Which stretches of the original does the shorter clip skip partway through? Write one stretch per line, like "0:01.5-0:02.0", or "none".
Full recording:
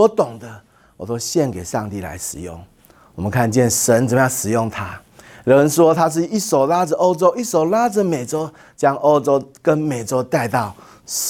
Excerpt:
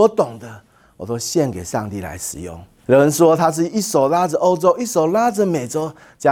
0:02.8-0:05.4